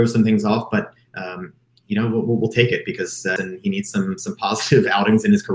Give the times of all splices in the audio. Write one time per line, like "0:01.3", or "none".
0:03.4